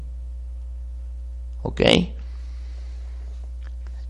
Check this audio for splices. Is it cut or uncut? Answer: uncut